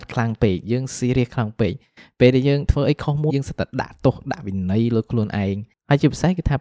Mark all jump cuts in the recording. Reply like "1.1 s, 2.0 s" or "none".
3.3 s